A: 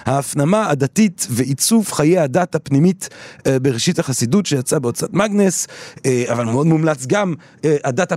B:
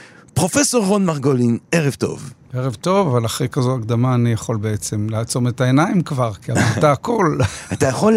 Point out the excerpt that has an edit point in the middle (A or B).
B